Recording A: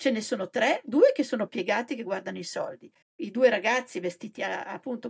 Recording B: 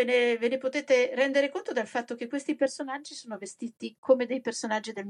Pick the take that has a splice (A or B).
A